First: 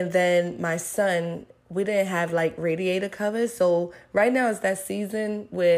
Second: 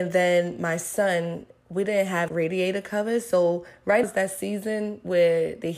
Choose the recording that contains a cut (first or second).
second